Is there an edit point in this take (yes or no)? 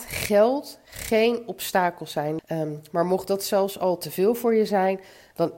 yes